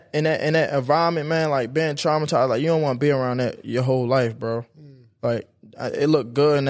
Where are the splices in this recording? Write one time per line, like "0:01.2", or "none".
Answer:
none